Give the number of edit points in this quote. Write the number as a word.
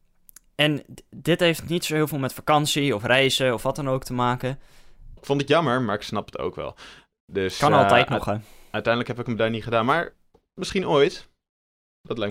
one